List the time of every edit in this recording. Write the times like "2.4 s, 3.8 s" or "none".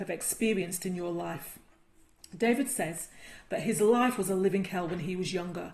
none

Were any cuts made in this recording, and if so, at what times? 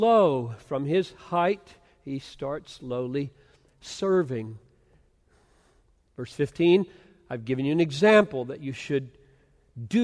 none

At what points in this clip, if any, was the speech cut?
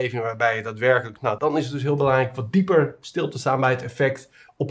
1.4 s

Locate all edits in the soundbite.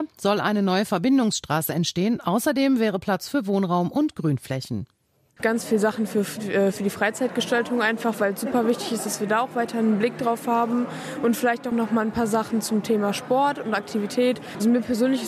5.4 s, 11.7 s

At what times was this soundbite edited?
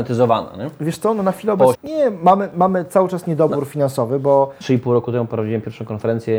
1.7 s, 4.6 s

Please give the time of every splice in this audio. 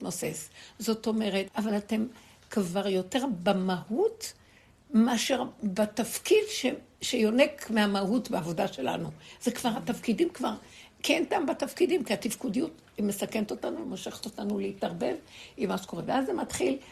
1.5 s

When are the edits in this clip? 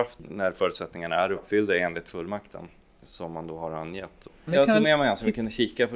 4.5 s

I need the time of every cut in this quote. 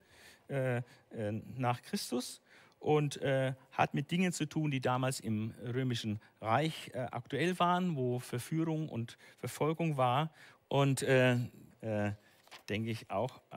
10.6 s, 11.7 s

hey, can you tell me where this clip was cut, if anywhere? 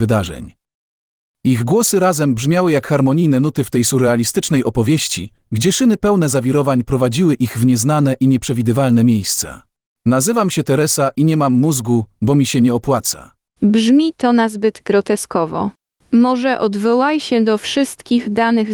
none

